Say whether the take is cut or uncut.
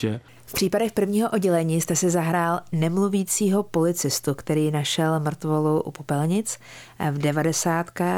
uncut